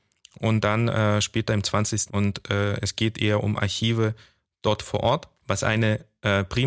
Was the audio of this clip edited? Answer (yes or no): yes